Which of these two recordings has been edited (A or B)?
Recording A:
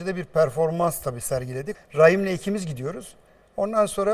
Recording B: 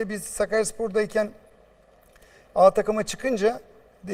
A